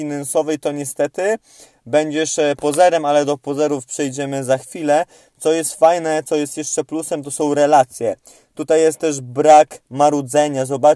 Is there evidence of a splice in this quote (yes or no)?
no